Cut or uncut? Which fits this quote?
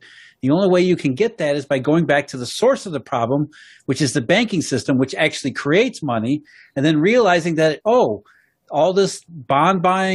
uncut